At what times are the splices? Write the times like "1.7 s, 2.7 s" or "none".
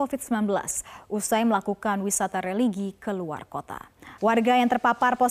4.2 s